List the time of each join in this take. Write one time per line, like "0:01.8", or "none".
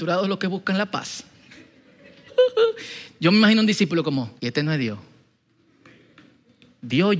0:02.3
0:04.4